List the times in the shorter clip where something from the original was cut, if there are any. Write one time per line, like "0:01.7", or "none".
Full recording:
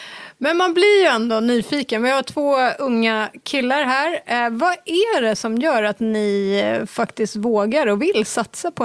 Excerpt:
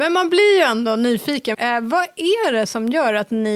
0:01.5